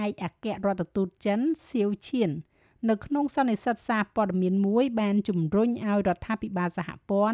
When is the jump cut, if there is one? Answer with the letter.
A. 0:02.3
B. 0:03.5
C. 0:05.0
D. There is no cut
D